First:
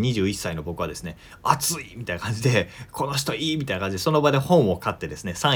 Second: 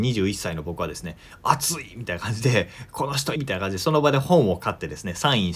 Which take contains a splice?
second; 1 cut; at 3.4 s

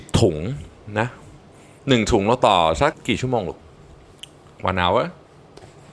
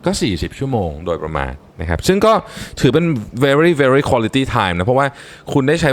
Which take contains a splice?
first; 1 cut; at 2.9 s

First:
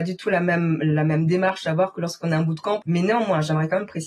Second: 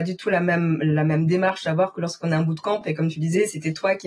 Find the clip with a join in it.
first; 1 cut; at 2.8 s

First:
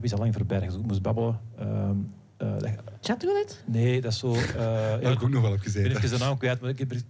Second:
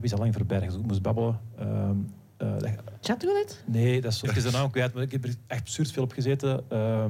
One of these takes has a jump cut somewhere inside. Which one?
second; 1 cut; at 4.2 s

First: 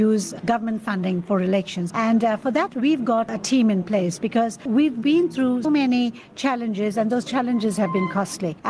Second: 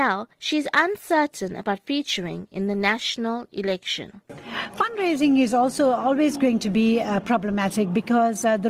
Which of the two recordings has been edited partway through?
first; 2 cuts; at 1.9 s, 5.6 s

